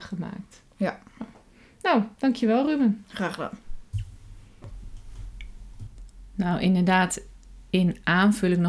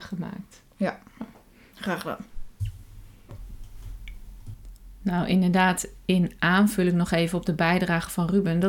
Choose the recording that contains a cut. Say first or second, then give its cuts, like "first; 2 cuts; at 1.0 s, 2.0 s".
second; 2 cuts; at 1.7 s, 6.0 s